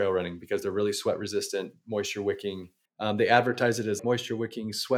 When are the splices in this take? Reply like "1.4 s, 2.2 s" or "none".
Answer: 2.9 s, 4.0 s